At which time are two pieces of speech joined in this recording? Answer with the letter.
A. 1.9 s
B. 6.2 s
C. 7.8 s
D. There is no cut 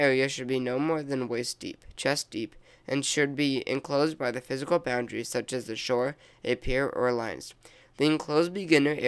D